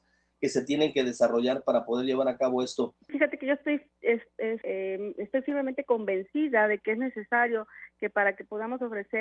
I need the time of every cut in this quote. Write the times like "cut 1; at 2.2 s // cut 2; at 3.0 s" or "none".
cut 1; at 3.1 s // cut 2; at 4.6 s